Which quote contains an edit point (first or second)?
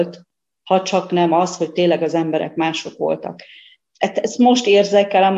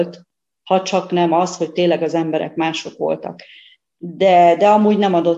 first